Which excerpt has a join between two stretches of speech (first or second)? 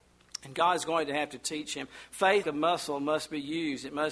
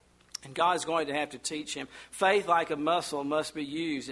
first